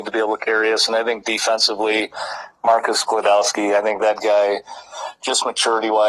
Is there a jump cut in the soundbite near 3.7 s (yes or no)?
no